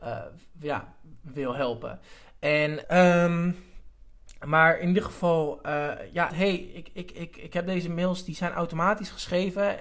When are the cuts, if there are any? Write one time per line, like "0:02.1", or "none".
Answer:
0:02.8
0:06.3

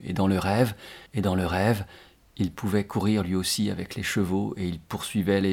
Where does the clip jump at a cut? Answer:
0:01.1

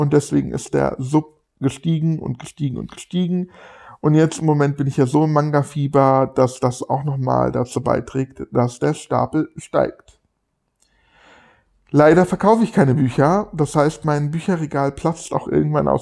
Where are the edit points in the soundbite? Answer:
none

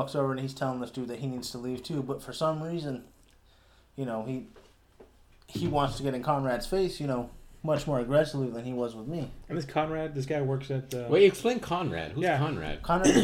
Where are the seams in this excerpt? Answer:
none

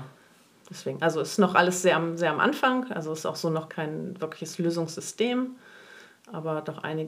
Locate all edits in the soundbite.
0:03.7

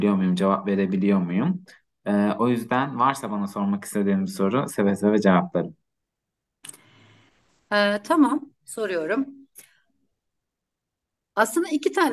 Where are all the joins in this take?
none

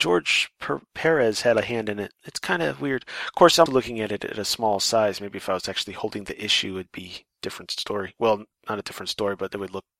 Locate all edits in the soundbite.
0:03.7

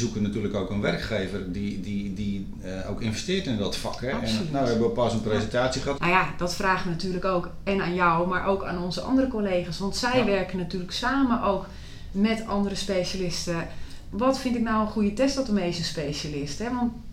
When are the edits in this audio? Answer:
0:06.0
0:14.1

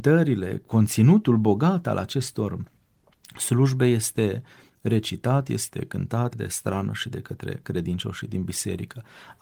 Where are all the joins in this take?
0:06.3

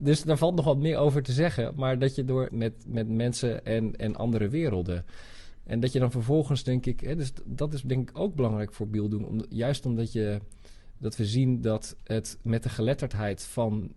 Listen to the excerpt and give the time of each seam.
0:02.5

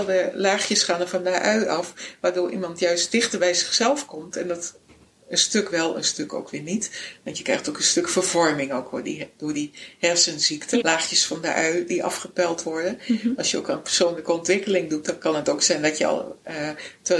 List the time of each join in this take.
0:10.8

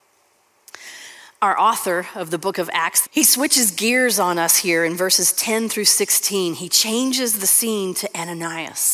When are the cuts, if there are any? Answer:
0:03.0

